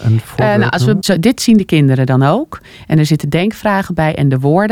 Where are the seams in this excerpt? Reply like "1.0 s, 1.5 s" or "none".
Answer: 1.0 s

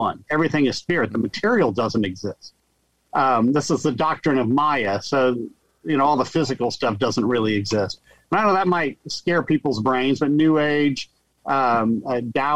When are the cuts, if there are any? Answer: none

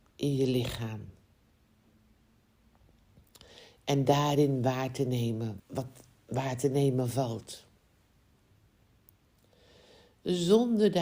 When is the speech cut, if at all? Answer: 5.6 s

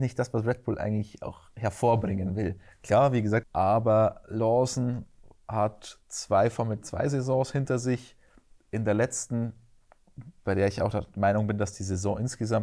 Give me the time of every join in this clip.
3.4 s

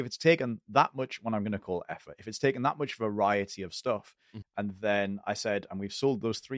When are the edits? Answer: 4.4 s

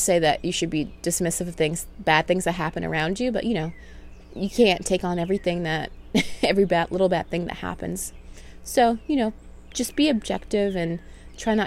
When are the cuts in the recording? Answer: none

